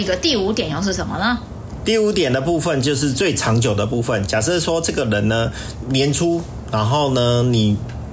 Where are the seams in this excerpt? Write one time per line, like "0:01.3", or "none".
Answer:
none